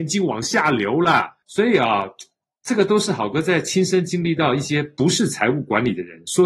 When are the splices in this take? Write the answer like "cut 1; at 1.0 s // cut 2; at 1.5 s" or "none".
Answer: cut 1; at 1.4 s